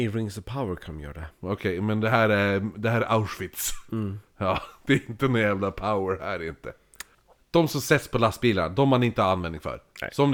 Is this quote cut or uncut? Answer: uncut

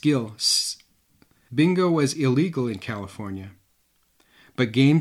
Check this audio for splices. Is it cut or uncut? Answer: cut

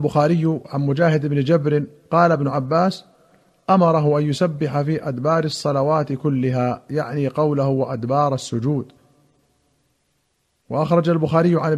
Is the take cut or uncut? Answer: uncut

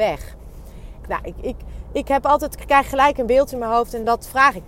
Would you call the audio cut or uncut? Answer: cut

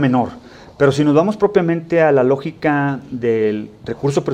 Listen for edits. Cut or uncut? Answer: uncut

